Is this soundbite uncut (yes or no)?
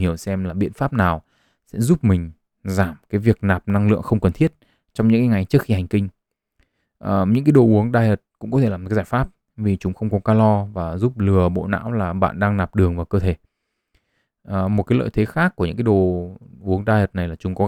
yes